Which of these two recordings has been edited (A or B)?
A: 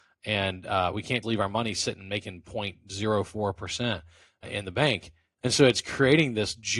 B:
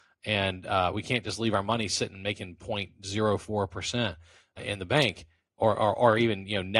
A